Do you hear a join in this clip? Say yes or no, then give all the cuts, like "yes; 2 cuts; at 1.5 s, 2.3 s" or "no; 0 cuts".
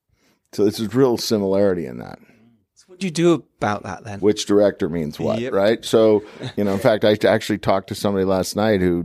yes; 1 cut; at 4.2 s